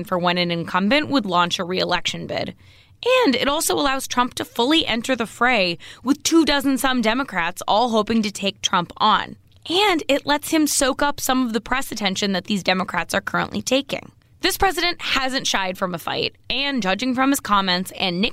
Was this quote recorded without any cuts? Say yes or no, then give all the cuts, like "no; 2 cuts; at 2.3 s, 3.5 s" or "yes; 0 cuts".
yes; 0 cuts